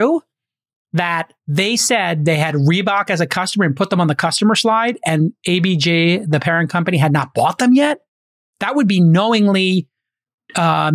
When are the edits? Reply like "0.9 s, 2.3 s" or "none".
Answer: 1.4 s